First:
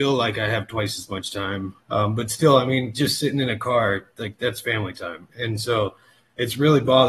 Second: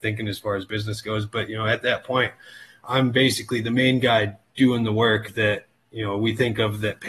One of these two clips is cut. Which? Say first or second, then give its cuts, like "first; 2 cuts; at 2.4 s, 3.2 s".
first; 1 cut; at 1.8 s